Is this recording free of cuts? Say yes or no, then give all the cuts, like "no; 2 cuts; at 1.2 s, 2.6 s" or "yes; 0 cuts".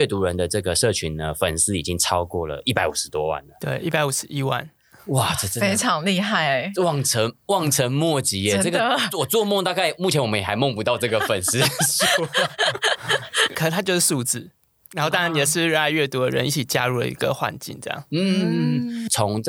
yes; 0 cuts